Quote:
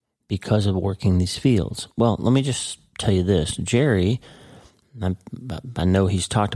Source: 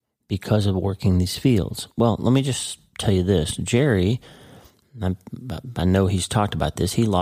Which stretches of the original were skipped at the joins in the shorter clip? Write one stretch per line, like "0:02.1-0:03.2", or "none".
none